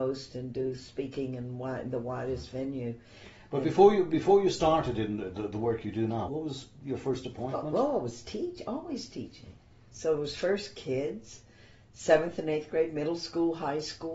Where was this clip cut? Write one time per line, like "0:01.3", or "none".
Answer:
0:06.3